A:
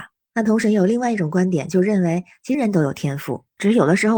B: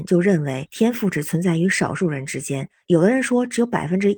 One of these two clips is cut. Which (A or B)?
A